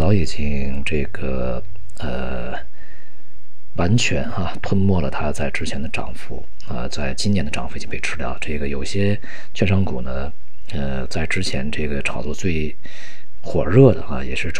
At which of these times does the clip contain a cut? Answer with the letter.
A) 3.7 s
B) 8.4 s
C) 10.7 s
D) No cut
D